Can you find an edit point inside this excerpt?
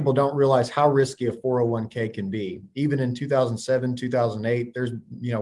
no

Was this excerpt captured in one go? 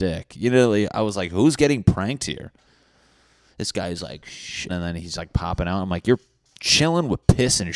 no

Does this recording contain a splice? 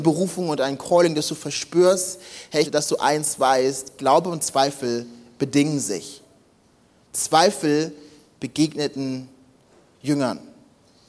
yes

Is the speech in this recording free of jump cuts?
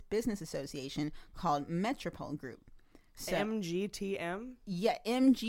yes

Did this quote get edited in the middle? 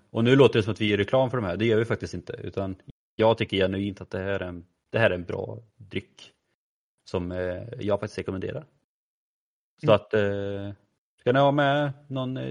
no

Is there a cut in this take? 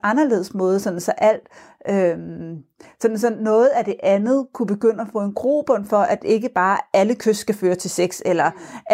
no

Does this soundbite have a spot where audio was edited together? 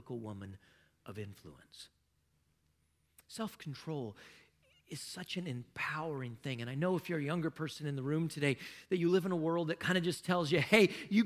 no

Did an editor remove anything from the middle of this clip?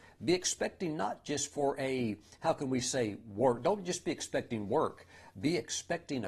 no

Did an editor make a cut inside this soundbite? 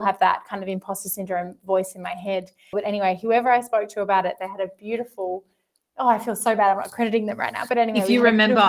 yes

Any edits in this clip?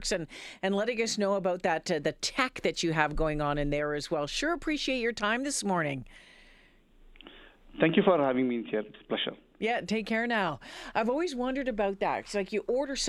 no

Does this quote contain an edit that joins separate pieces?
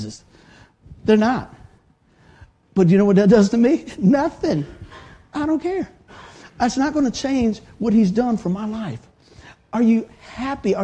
no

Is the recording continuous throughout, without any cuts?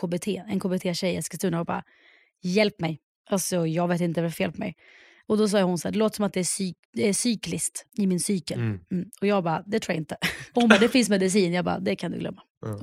no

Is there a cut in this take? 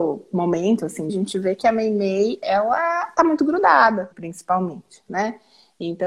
yes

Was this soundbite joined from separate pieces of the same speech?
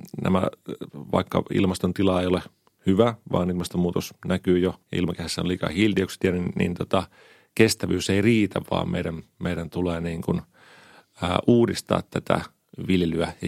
yes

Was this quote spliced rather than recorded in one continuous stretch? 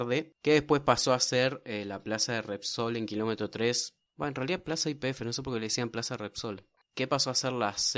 yes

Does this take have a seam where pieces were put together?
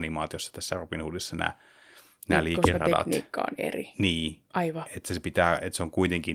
no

